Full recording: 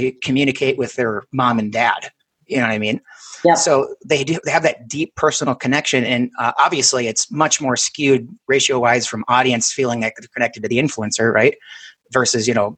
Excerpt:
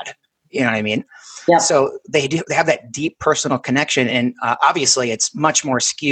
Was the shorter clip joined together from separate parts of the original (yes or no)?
no